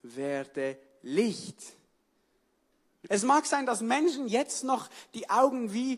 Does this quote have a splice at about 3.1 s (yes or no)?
yes